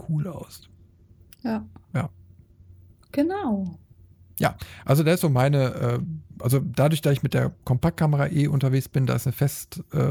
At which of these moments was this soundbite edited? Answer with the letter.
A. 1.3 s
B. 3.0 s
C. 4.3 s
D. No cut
B